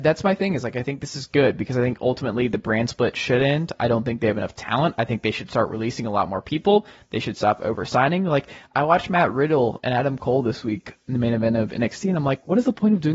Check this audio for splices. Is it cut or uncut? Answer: uncut